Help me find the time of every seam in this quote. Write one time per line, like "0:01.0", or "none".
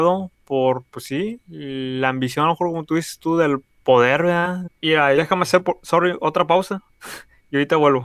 0:04.7

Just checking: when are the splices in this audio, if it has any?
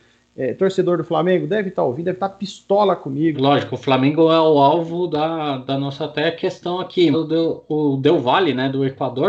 0:03.3
0:07.1

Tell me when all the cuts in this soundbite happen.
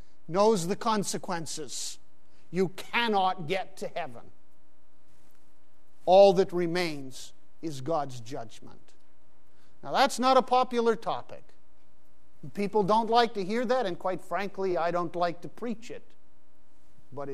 none

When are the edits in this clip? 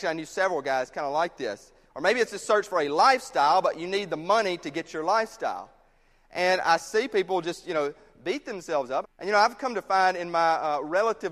0:01.9
0:09.0

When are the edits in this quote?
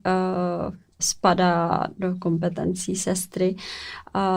0:01.0

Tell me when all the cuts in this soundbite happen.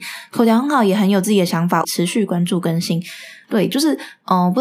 0:01.8
0:03.4

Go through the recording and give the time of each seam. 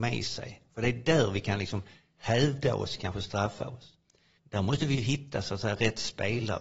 0:04.4

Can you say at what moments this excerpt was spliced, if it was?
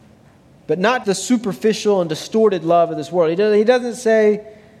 0:01.0

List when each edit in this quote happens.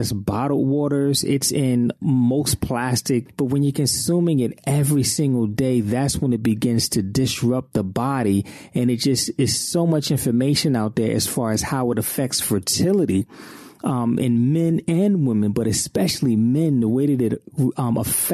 0:03.3

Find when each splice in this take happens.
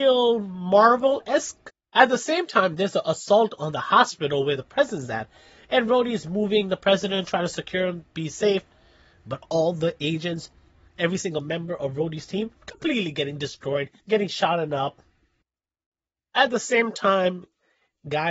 0:12.6
0:14.0

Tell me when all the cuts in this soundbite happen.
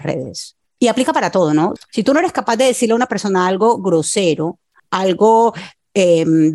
0:01.8

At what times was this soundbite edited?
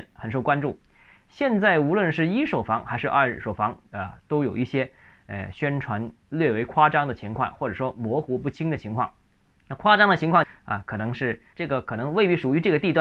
0:03.9
0:11.5

